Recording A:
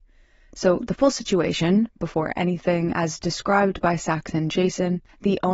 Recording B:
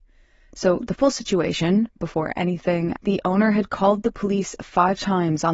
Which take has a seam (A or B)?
B